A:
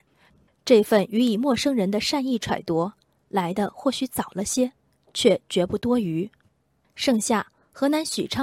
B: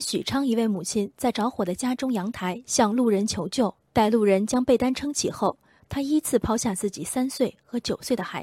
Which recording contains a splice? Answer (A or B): B